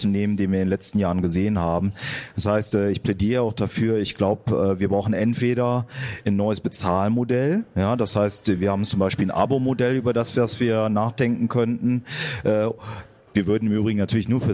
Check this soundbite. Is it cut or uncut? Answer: uncut